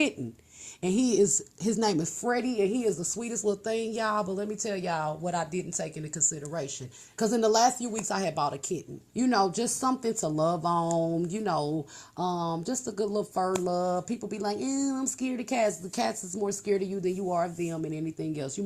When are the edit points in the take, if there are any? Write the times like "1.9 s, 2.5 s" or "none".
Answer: 7.1 s, 9.1 s